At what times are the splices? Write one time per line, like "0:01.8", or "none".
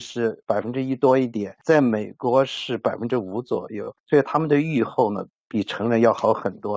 0:04.0